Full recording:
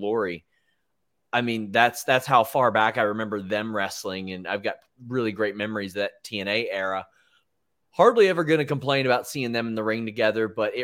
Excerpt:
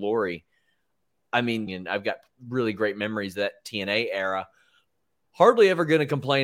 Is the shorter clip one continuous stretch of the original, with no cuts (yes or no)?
no